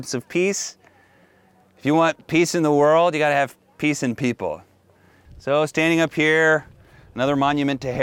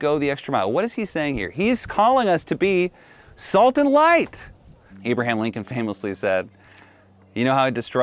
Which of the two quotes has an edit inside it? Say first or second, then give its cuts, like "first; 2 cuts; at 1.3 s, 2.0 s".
second; 1 cut; at 4.9 s